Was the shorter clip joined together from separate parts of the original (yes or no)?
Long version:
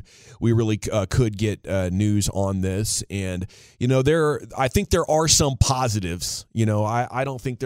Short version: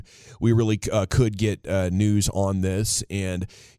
no